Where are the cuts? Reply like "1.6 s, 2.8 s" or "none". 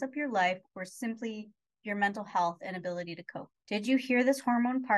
none